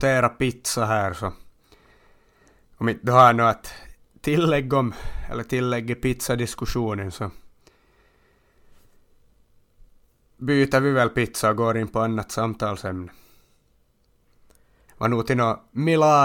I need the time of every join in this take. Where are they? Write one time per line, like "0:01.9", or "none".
0:14.9